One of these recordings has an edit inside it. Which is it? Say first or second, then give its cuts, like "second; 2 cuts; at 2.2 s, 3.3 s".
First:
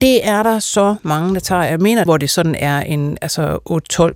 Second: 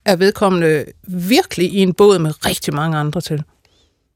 first; 1 cut; at 2.1 s